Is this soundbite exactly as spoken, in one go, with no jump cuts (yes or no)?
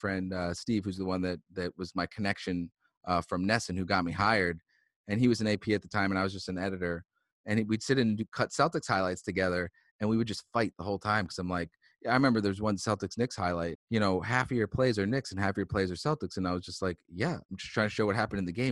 no